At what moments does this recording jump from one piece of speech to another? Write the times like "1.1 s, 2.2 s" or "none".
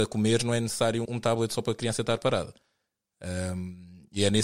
1.0 s